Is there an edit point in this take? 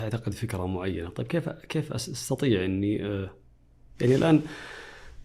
no; 0 cuts

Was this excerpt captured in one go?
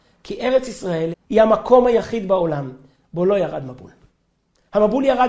no; 1 cut; at 1.1 s

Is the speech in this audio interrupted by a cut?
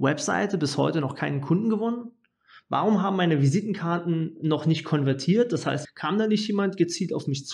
yes; 1 cut; at 5.8 s

